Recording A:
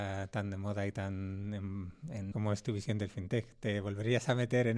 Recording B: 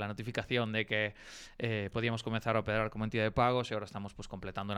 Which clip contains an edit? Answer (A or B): A